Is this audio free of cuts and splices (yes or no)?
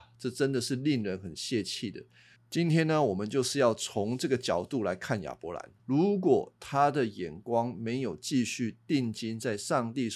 no